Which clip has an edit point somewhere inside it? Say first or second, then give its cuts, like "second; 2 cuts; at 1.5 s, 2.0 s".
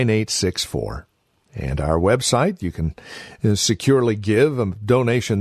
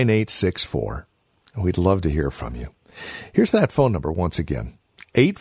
second; 1 cut; at 1.4 s